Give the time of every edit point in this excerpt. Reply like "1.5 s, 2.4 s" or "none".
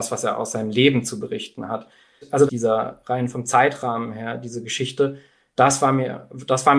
2.5 s

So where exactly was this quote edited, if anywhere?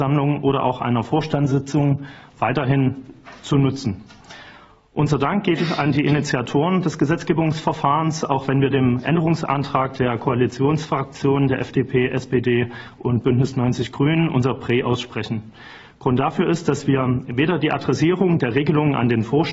none

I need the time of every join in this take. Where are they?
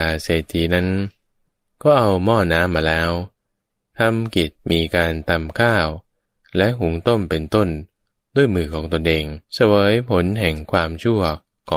4.6 s, 9.4 s

